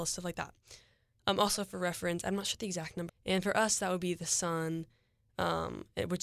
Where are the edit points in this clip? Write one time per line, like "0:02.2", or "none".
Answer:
0:03.1